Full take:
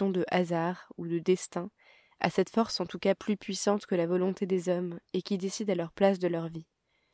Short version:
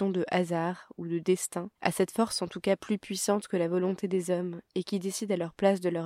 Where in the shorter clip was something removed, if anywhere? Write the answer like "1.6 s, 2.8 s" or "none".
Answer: 1.8 s